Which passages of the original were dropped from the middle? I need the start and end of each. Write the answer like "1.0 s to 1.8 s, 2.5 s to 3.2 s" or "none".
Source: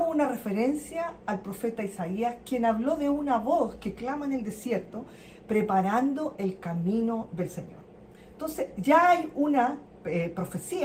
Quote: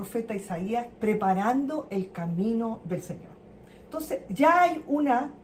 2.4 s to 5.4 s